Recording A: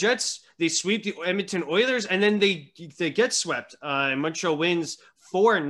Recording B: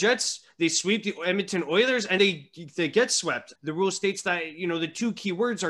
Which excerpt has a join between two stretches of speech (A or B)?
B